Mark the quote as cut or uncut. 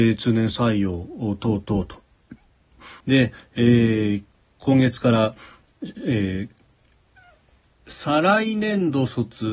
cut